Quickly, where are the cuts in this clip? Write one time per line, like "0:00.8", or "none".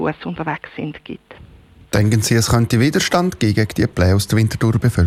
none